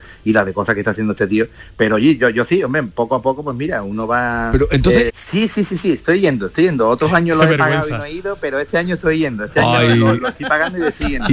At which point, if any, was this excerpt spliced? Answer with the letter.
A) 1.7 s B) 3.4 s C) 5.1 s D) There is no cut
C